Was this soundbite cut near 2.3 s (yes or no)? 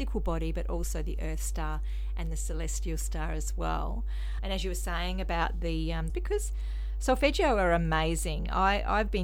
no